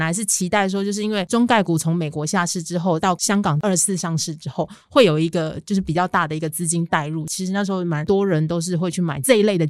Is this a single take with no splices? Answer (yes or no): yes